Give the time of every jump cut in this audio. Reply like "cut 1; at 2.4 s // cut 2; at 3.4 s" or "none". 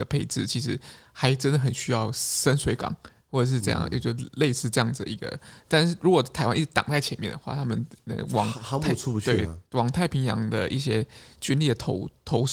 none